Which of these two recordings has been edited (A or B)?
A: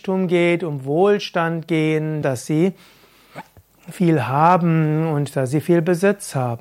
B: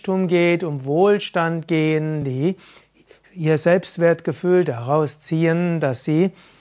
A